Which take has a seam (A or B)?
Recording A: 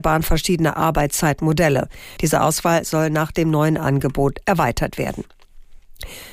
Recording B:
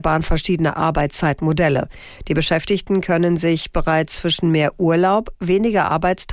A